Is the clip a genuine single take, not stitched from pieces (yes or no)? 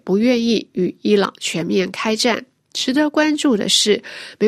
no